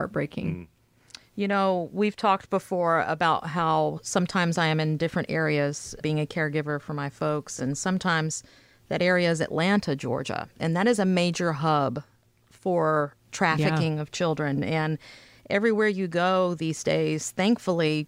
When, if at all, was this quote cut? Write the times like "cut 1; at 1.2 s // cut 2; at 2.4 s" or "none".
none